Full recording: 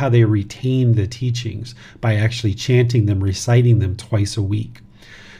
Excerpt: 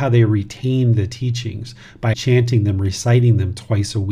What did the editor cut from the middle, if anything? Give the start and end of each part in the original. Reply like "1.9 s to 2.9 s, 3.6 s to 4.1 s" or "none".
2.1 s to 2.6 s

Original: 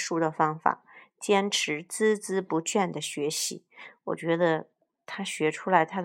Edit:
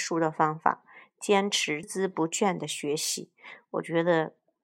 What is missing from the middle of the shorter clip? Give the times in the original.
1.8 s to 2.2 s

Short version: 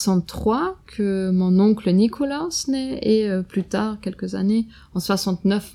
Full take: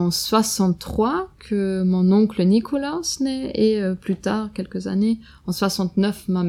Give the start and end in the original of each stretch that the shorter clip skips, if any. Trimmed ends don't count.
none

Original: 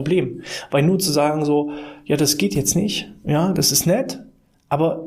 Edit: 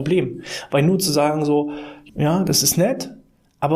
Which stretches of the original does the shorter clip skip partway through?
2.1 s to 3.2 s

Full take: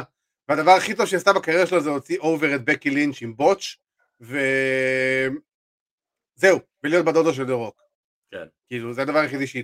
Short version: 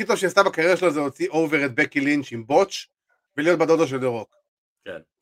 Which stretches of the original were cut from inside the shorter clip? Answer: 4.2 s to 6.7 s

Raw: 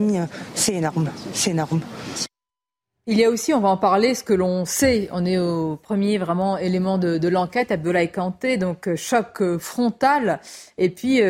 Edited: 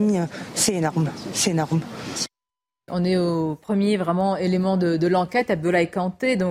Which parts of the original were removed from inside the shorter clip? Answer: 2.9 s to 5.1 s

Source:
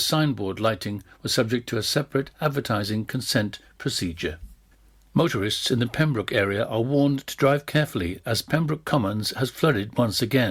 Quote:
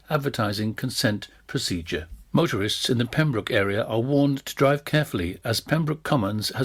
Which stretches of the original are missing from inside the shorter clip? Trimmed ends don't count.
4.6 s to 5.1 s

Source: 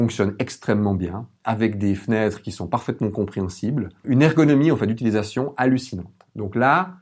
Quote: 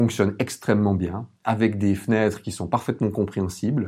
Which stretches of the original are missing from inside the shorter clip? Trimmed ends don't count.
none

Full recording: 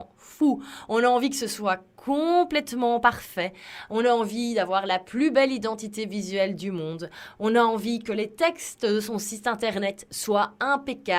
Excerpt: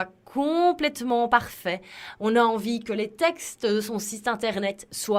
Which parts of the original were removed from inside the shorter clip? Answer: 3.9 s to 7.3 s

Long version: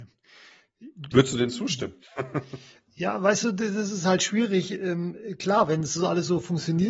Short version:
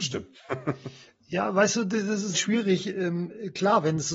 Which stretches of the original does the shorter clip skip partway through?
4.0 s to 4.2 s

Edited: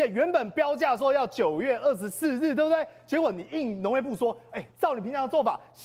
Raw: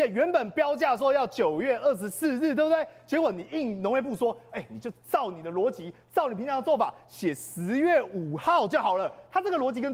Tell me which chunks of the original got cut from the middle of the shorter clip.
4.7 s to 6.0 s

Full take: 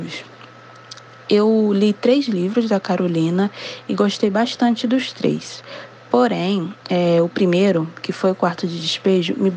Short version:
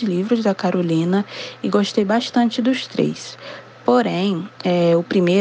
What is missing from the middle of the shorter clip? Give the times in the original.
none

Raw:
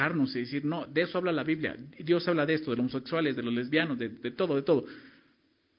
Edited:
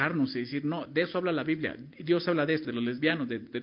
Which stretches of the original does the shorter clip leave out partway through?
2.6 s to 3.3 s

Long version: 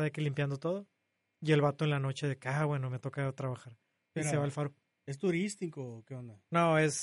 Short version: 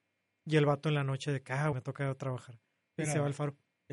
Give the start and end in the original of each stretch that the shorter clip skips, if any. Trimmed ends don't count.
2.7 s to 2.9 s

